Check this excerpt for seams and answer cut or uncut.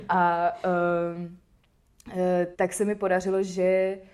cut